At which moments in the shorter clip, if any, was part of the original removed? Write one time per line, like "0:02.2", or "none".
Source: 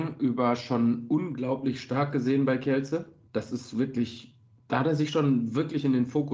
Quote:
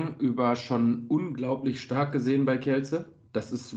none